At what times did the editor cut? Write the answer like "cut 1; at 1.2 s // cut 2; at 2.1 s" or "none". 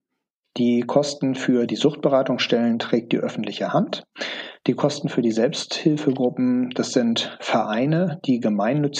none

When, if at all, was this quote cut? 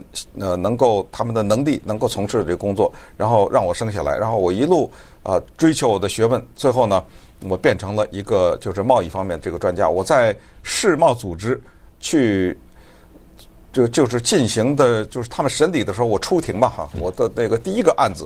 none

